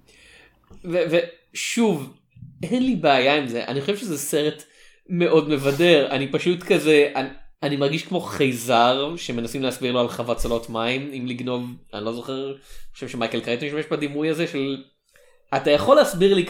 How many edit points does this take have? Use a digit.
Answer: 2